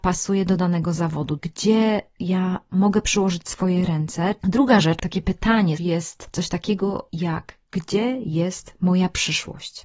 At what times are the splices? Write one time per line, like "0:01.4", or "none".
0:01.4
0:04.4
0:05.8